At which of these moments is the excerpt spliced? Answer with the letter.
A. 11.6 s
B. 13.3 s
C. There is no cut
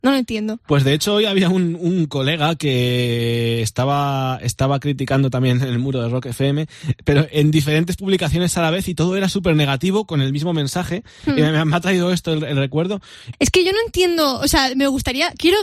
B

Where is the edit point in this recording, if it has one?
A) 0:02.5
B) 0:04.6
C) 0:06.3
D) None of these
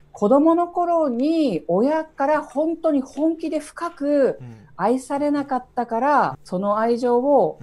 C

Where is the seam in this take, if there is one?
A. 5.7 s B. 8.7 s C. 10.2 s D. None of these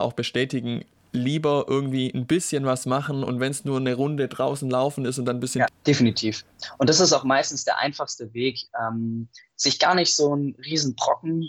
A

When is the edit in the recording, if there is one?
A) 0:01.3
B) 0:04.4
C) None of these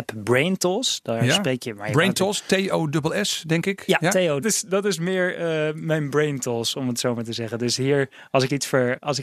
B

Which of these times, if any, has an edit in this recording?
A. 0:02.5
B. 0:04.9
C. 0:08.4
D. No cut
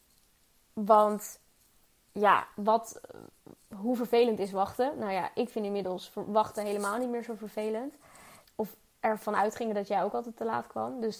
C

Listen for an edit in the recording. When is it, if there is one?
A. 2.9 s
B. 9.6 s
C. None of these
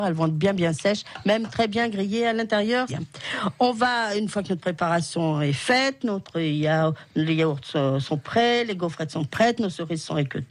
A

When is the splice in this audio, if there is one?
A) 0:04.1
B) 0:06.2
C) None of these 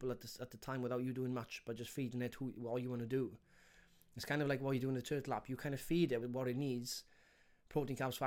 B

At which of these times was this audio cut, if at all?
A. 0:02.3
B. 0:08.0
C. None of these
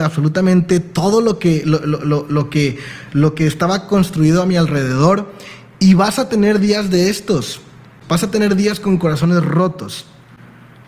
B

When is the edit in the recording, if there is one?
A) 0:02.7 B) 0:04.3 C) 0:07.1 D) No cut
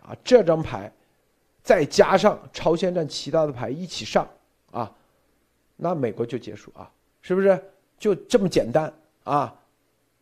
C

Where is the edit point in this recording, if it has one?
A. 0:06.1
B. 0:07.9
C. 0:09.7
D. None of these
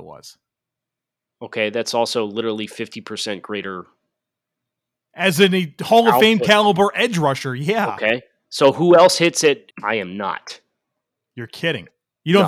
C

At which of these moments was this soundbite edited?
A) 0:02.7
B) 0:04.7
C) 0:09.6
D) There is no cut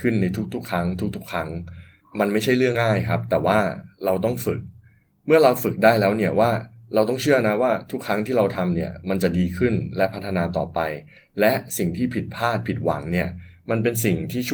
A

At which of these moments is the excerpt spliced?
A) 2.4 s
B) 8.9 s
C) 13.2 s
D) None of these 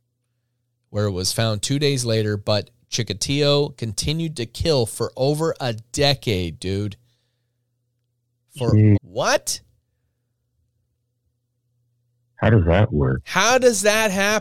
B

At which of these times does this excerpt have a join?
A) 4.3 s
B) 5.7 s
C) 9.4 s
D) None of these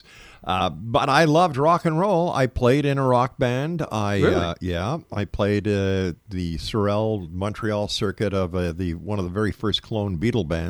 D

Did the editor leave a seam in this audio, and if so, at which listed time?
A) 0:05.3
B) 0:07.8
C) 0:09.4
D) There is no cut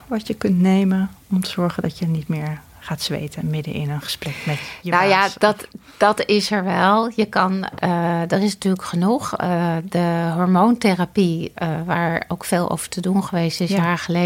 B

